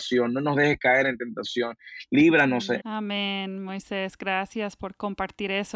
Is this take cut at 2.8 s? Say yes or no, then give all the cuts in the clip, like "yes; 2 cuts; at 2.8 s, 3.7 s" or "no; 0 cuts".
yes; 1 cut; at 2.8 s